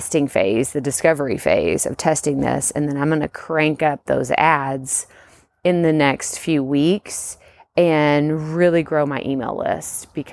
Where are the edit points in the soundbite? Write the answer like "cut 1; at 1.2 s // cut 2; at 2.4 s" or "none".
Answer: none